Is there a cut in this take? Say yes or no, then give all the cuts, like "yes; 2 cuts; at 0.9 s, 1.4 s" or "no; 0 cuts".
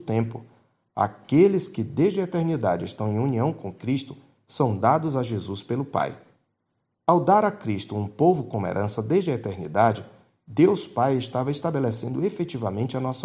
no; 0 cuts